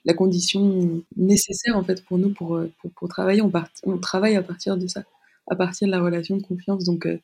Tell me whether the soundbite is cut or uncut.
uncut